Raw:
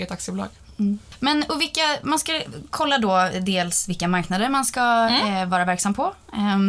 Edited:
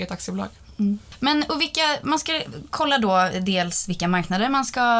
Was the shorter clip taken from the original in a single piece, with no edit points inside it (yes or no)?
yes